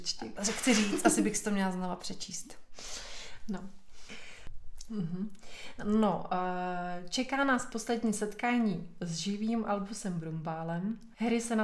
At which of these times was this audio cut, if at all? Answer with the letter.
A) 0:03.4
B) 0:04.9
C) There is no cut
B